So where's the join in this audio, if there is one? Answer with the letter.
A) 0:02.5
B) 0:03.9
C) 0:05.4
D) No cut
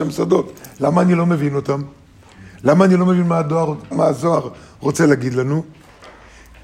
B